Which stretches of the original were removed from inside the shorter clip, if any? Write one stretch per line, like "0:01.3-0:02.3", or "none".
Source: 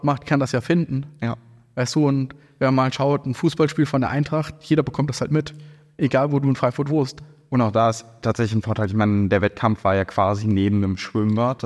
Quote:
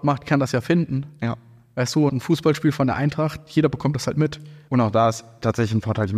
0:02.1-0:03.2
0:05.8-0:07.5